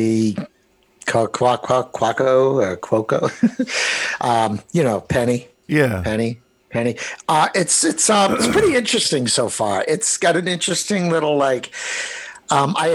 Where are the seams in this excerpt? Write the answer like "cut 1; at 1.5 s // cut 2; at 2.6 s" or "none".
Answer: none